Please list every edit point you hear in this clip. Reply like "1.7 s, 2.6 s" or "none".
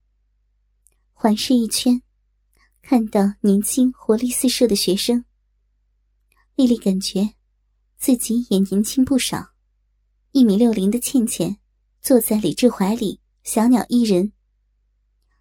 10.3 s